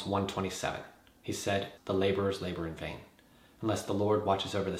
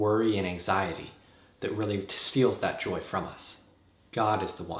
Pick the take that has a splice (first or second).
first